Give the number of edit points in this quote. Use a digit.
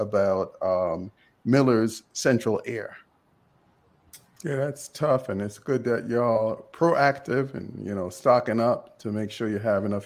1